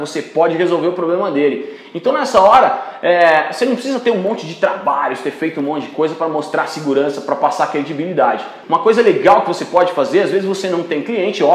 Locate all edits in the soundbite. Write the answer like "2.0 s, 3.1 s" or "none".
8.6 s